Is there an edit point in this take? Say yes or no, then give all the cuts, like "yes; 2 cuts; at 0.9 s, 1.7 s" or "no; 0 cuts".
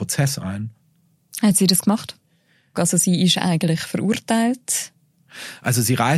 yes; 1 cut; at 2.7 s